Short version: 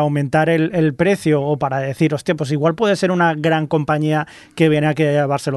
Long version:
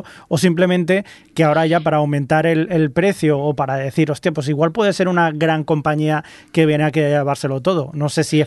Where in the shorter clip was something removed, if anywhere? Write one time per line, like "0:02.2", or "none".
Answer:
none